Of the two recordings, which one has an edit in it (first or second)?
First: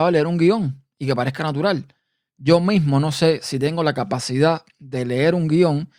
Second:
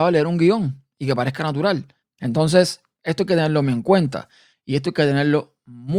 second